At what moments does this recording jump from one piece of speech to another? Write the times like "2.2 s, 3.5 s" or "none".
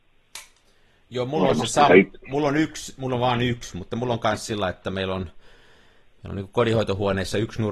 1.9 s